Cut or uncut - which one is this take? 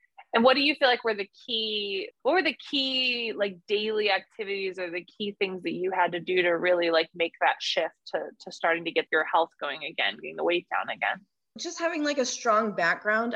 uncut